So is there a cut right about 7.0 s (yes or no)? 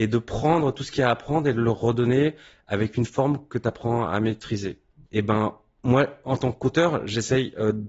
no